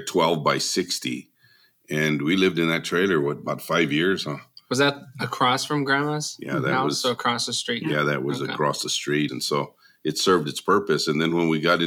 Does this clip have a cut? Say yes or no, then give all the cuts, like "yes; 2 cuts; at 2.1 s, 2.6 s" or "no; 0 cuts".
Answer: yes; 1 cut; at 9.3 s